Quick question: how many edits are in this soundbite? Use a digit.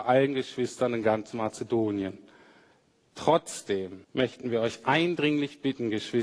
1